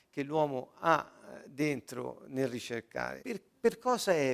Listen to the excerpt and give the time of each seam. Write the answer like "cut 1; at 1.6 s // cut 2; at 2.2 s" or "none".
cut 1; at 3.2 s

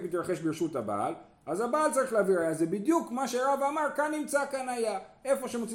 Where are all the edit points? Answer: none

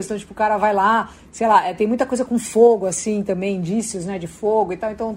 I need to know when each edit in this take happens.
none

